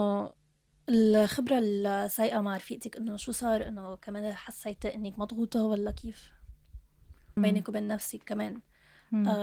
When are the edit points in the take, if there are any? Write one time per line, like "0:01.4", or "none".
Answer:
0:07.4